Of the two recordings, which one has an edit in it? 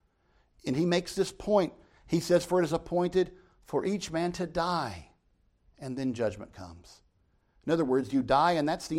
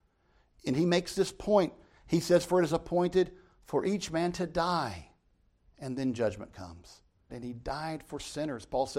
second; 1 cut; at 7.3 s

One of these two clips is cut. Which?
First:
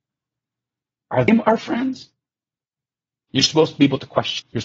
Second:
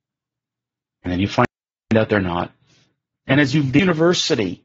first; 2 cuts; at 0.9 s, 3.3 s

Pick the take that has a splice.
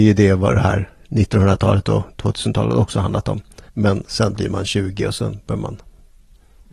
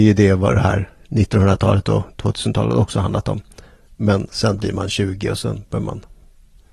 first; 1 cut; at 3.7 s

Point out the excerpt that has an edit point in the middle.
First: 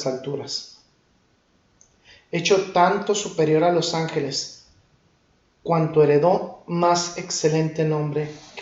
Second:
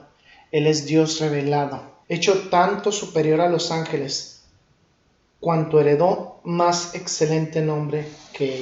second; 1 cut; at 2.0 s

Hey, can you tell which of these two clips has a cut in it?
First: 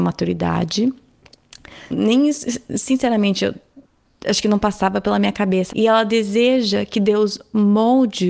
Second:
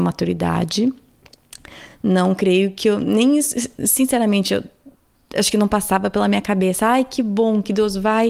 first; 2 cuts; at 1.9 s, 5.7 s

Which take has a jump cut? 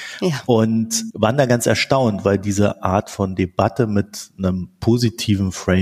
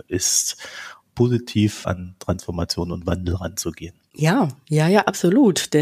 second; 1 cut; at 1.0 s

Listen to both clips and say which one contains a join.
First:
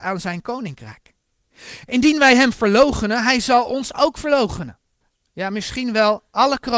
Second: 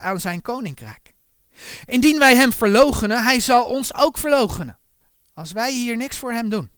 first; 1 cut; at 5.3 s

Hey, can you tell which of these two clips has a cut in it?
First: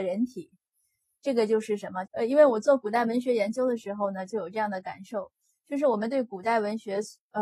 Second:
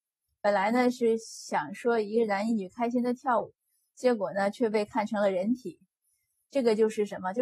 first; 1 cut; at 2.1 s

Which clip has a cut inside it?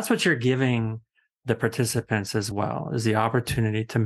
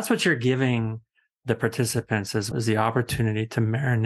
second; 1 cut; at 2.5 s

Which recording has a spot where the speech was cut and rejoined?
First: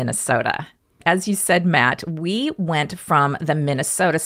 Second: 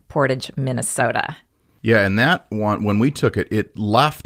first; 1 cut; at 1.0 s

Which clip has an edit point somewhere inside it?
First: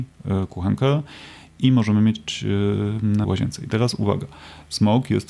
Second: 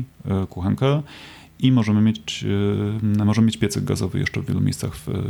first; 1 cut; at 3.2 s

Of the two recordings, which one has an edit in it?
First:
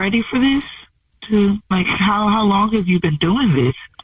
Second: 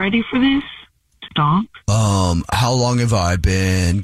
second; 1 cut; at 1.3 s

